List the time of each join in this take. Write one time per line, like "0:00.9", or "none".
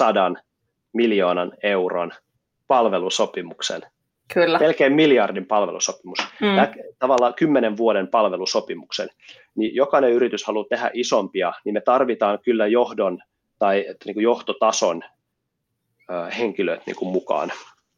none